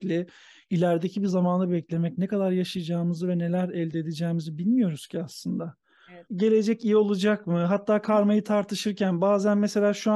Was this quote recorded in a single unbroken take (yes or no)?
no